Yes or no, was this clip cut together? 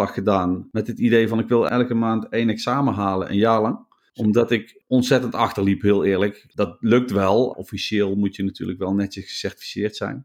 yes